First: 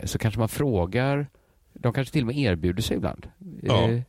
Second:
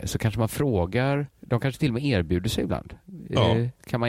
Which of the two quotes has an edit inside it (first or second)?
second